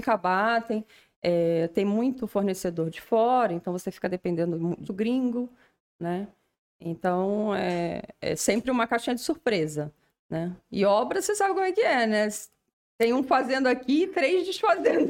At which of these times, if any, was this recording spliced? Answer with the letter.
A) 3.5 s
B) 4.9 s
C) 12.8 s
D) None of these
B